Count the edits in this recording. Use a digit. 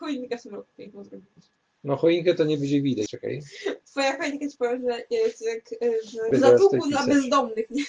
2